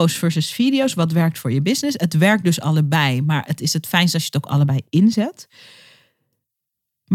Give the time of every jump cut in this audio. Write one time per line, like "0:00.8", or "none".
none